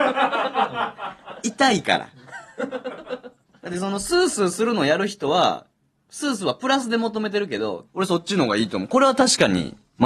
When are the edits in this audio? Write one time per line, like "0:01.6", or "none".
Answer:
0:07.8